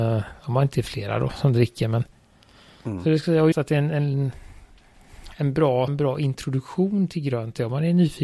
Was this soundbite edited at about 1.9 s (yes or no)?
no